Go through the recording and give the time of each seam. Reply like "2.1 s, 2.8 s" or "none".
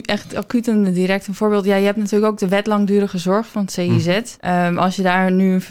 4.4 s